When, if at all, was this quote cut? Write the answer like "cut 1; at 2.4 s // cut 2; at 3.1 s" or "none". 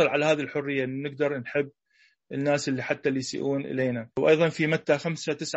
cut 1; at 4.1 s